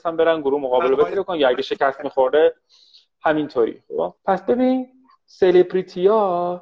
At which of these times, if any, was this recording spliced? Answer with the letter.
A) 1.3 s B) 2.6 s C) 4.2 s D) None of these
C